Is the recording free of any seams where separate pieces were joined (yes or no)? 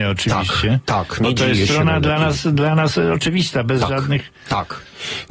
yes